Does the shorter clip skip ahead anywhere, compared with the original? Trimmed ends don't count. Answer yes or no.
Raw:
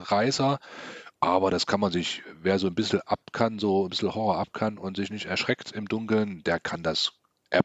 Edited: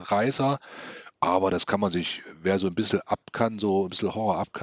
no